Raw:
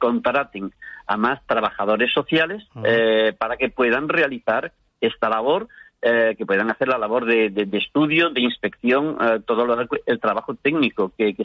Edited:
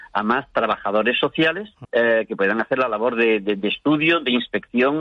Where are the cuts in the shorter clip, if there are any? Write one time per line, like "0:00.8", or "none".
0:01.8